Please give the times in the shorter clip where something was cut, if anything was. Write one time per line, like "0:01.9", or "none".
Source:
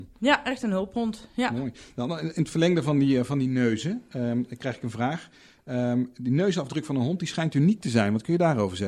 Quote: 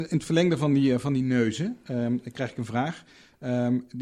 none